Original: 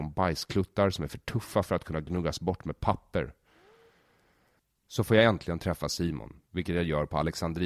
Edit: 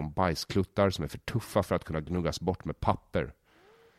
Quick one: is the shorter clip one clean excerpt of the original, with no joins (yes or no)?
yes